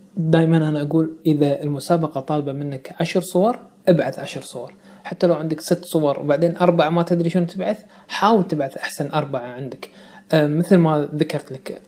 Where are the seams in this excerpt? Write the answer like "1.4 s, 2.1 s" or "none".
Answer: none